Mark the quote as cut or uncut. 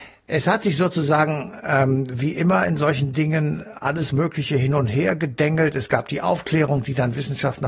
uncut